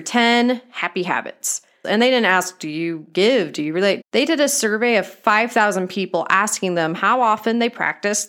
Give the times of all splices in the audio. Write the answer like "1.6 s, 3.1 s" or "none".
1.8 s, 4.0 s